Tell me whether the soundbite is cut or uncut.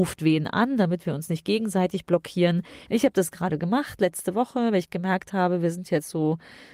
cut